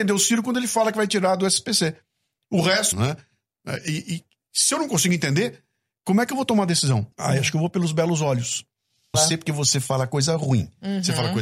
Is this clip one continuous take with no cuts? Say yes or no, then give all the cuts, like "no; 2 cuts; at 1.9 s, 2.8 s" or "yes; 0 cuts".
no; 3 cuts; at 2.9 s, 7.1 s, 9.1 s